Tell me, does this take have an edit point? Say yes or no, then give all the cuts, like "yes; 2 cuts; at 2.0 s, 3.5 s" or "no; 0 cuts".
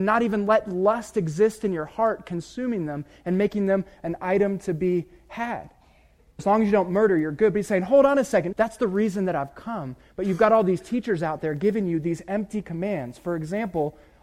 yes; 2 cuts; at 6.4 s, 8.5 s